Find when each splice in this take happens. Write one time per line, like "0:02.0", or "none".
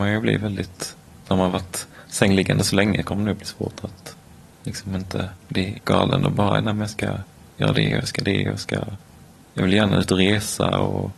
none